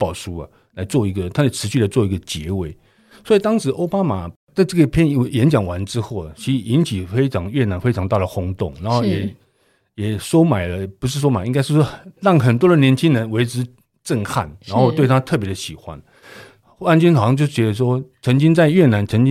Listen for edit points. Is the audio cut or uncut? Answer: uncut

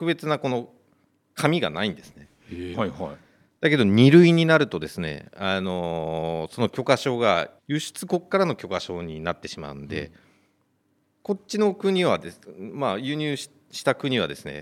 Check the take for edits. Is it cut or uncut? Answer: cut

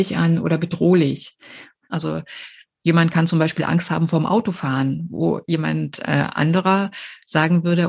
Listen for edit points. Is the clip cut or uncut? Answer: cut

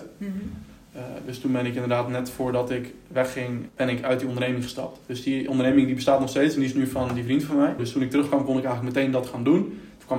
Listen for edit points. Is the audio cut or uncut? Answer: cut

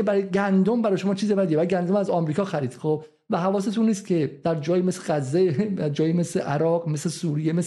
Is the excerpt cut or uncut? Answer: uncut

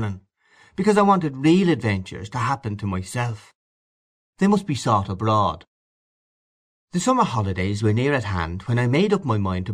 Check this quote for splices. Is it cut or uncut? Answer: cut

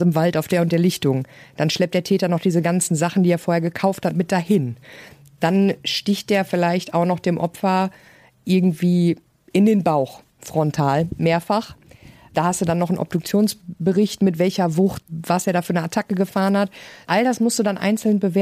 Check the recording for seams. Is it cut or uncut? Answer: uncut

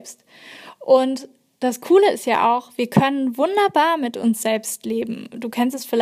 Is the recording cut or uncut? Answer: uncut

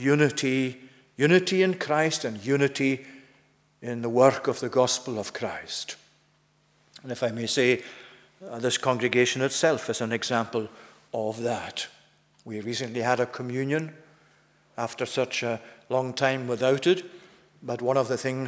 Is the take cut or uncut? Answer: uncut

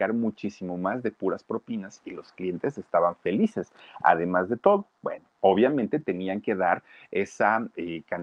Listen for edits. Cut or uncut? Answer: uncut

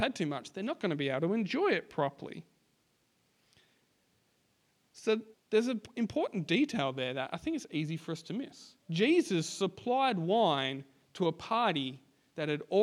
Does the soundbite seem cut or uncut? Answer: cut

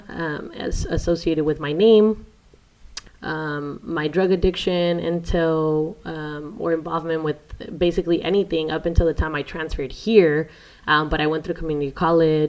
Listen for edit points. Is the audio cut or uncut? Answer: cut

